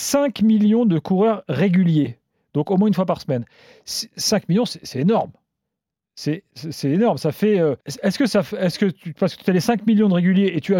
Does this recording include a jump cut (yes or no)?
yes